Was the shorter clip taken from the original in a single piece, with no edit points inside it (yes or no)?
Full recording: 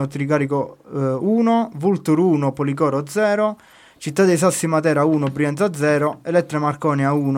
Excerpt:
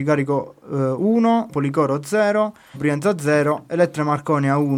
no